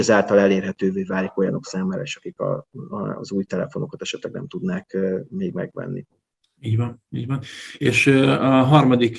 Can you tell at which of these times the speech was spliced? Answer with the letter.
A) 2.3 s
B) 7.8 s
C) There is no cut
C